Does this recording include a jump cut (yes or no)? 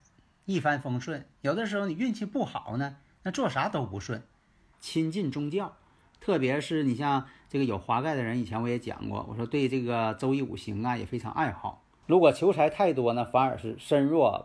yes